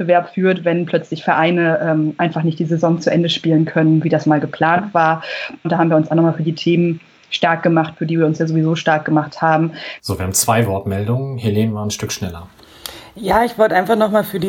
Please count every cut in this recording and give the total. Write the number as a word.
two